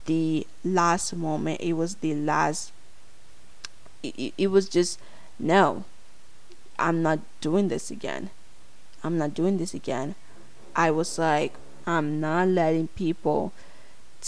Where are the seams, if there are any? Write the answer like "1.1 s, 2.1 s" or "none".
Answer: none